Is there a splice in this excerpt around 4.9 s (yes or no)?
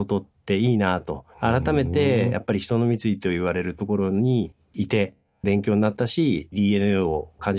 no